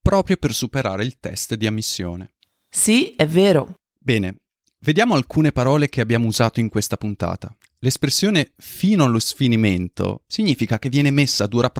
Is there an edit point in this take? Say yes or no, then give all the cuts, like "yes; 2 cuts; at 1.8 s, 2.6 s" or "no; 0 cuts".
no; 0 cuts